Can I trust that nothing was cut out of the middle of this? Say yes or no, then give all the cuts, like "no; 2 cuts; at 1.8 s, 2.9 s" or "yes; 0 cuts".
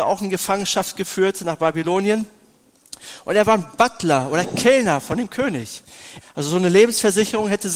no; 1 cut; at 6.2 s